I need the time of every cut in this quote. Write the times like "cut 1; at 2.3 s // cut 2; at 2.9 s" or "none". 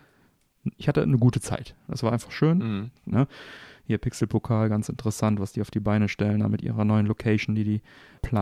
cut 1; at 3.1 s